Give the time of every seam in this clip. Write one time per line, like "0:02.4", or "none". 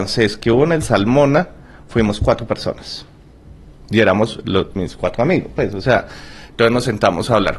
none